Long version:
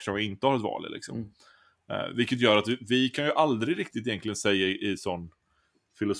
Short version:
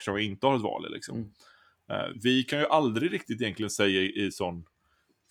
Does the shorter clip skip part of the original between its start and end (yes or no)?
yes